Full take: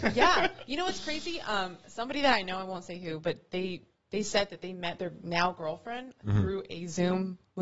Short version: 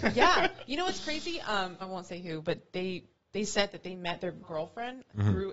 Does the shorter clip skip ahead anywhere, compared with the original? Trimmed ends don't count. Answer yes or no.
yes